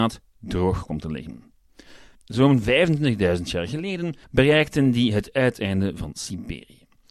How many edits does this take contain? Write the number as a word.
two